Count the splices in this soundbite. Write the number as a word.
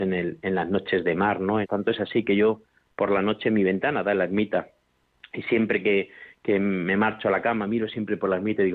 one